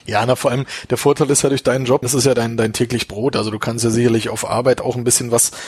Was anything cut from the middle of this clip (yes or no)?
yes